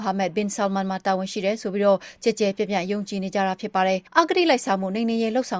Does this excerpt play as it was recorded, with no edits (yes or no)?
no